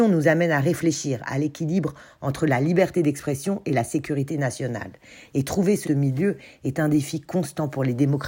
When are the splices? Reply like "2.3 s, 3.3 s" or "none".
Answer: 5.8 s